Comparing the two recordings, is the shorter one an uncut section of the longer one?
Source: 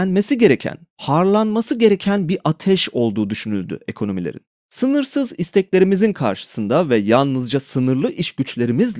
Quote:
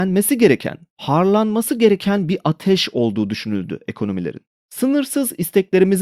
yes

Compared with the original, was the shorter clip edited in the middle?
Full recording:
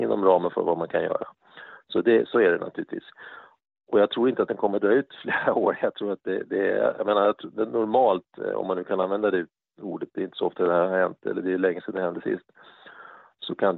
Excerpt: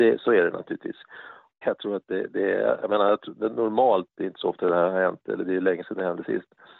yes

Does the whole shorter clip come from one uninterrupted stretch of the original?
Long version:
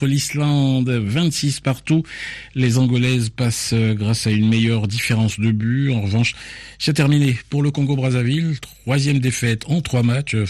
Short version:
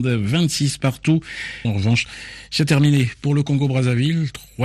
no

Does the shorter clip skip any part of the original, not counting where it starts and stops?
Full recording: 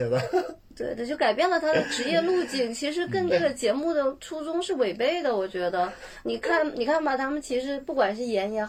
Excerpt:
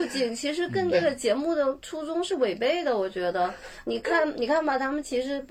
no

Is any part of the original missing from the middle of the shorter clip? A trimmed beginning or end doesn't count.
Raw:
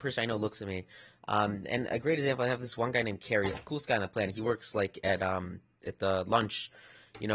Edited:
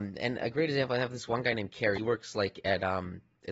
yes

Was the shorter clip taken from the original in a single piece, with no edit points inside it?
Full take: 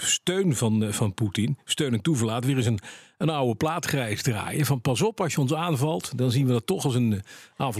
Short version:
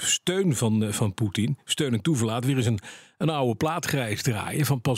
yes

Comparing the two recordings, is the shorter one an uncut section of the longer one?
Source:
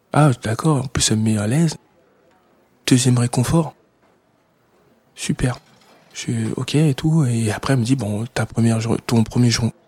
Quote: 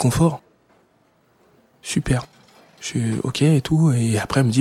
yes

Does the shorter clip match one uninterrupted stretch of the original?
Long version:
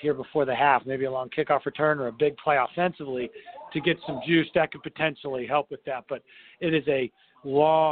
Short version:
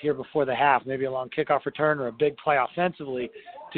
yes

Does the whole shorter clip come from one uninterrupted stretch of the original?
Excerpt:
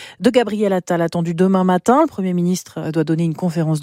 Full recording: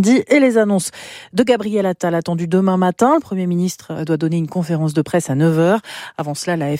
yes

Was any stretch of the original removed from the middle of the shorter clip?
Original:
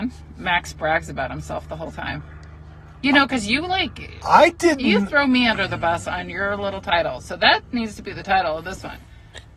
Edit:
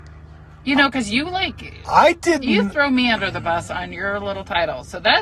no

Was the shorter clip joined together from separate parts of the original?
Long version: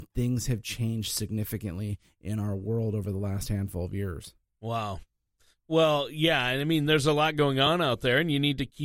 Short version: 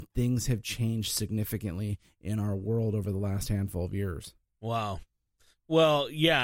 no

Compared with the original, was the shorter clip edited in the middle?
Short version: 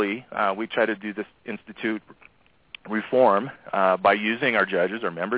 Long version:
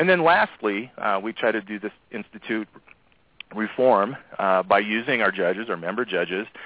no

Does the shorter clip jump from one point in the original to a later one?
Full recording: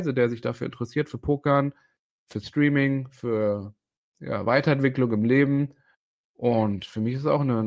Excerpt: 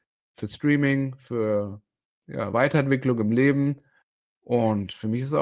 no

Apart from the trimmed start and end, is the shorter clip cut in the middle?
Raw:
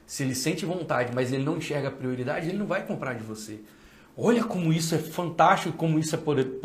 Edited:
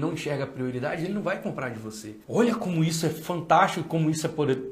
yes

